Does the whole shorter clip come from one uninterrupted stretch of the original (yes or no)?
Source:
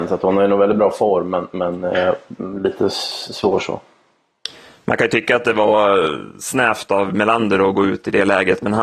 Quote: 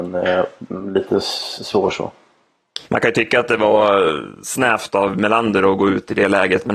no